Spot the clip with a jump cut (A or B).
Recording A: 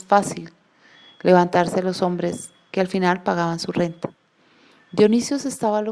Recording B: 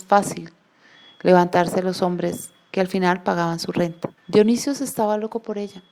B